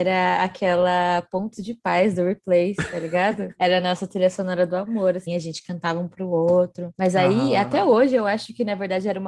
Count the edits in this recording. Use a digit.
2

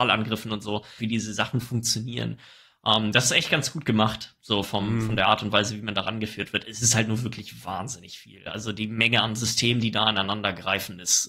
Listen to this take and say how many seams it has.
1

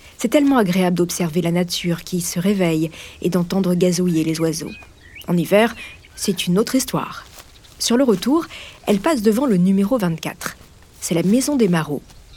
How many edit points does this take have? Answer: 0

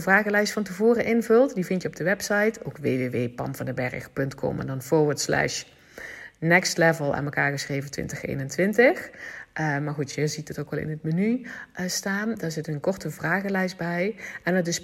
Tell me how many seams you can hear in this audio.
0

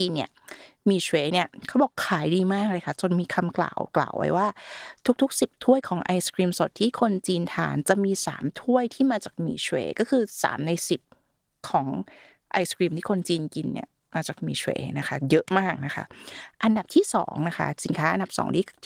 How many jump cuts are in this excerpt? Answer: 0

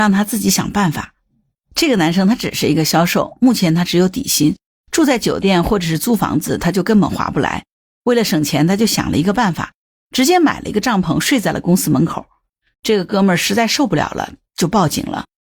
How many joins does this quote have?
1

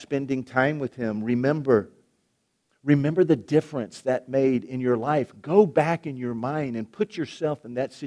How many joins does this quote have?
0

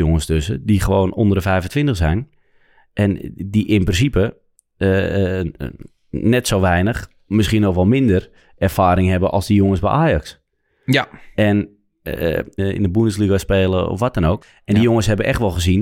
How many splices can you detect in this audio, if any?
2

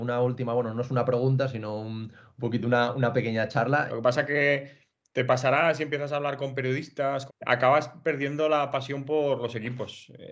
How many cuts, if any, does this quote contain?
2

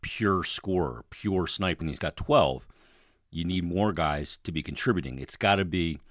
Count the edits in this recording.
1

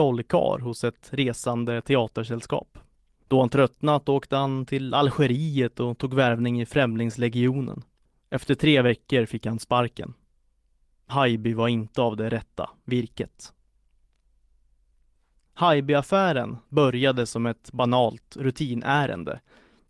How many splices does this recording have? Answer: 0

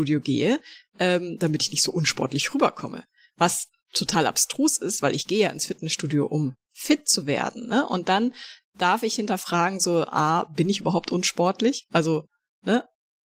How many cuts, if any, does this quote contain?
0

